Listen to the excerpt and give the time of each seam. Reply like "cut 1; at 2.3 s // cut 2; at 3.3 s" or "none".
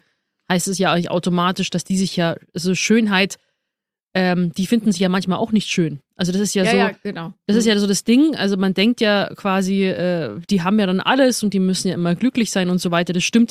none

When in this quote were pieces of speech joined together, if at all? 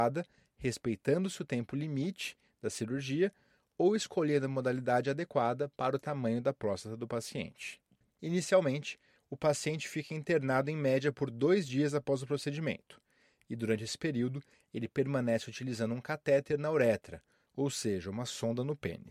cut 1; at 8.0 s

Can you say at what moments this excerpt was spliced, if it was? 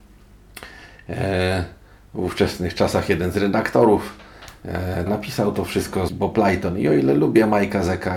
cut 1; at 5.1 s // cut 2; at 6.1 s

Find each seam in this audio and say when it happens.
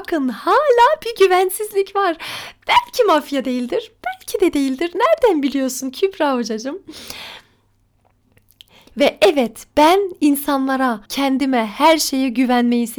cut 1; at 11.0 s

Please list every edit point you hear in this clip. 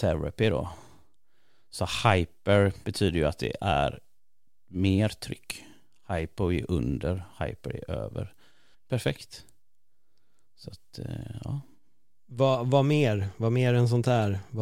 cut 1; at 8.7 s

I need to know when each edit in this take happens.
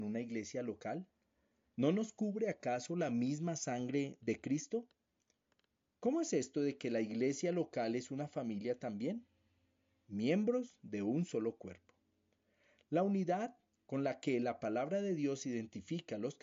none

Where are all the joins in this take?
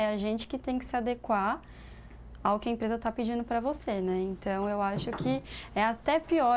none

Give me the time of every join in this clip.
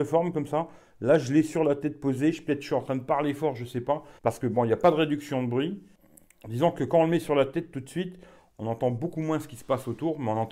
cut 1; at 4.2 s

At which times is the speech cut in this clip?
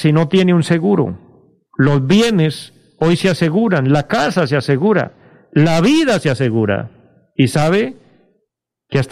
cut 1; at 1.7 s

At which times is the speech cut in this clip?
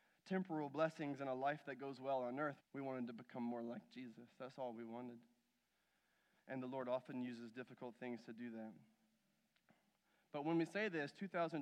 cut 1; at 2.6 s

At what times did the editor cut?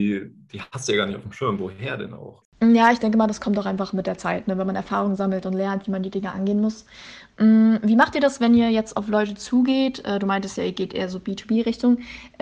none

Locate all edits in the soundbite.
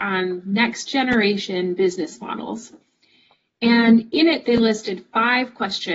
none

